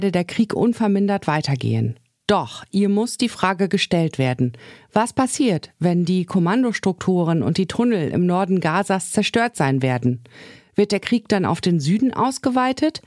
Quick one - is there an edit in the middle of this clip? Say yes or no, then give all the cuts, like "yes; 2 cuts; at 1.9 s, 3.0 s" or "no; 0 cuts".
no; 0 cuts